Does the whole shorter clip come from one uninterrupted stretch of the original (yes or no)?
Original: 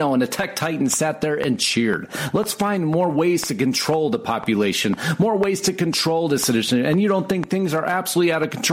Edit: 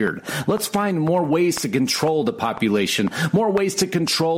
yes